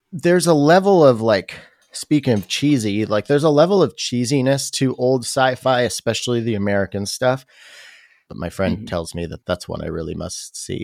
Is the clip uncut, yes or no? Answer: no